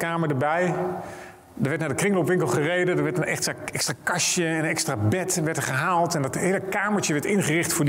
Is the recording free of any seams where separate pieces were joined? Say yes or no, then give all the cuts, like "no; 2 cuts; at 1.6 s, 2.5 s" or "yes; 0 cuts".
yes; 0 cuts